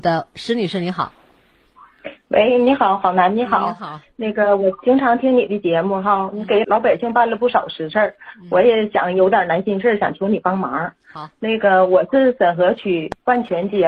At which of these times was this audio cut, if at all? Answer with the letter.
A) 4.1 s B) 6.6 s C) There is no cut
B